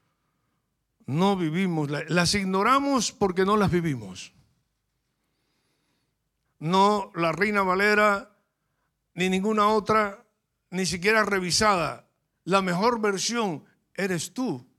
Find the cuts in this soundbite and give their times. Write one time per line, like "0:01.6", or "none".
0:06.4